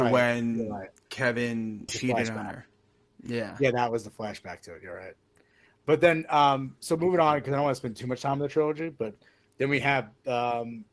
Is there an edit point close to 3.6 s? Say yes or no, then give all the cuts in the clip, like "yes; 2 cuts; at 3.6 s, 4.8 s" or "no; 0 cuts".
no; 1 cut; at 1.9 s